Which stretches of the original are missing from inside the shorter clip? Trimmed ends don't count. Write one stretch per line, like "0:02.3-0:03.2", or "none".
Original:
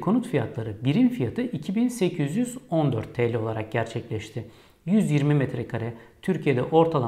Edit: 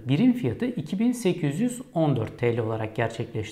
none